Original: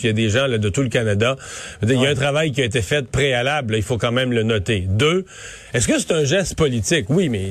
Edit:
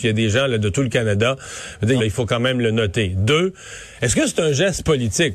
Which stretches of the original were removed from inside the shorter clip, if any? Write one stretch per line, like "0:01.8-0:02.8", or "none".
0:02.0-0:03.7